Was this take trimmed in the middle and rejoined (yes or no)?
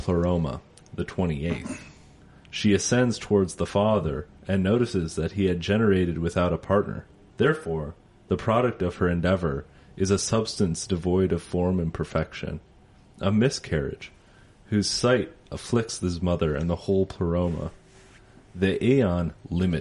yes